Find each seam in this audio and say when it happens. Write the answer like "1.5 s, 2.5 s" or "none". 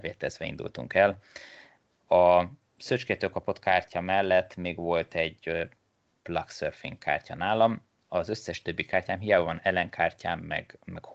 2.0 s